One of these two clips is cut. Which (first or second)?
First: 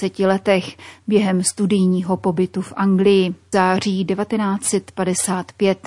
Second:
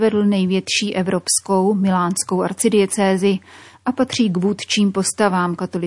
first